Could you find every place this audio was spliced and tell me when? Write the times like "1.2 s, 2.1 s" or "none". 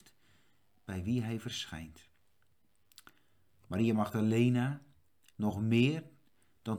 5.3 s